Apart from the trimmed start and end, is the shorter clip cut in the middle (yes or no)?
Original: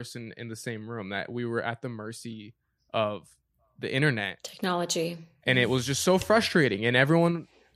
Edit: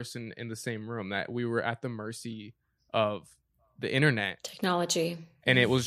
no